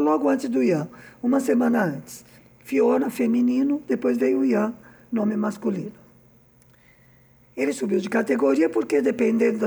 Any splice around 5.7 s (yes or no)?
no